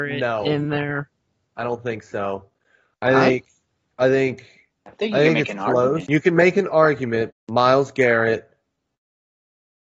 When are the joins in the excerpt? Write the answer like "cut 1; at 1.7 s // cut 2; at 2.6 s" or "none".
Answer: cut 1; at 6.1 s // cut 2; at 7.3 s